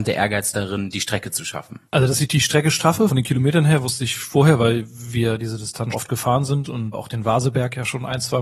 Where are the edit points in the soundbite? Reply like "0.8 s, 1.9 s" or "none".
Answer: 5.9 s